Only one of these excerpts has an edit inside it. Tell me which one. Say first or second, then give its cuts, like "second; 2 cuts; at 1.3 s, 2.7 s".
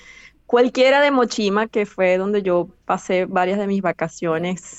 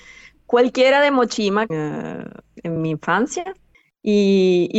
second; 2 cuts; at 1.7 s, 2.8 s